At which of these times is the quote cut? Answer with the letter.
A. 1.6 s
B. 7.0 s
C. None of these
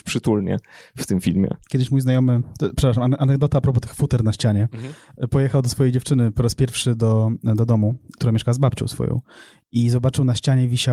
A